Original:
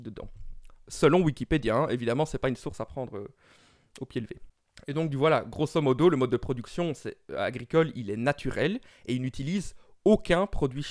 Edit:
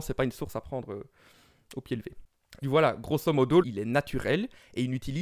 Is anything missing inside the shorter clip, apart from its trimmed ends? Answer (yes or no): yes